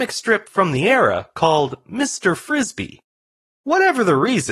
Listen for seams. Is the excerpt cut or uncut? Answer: uncut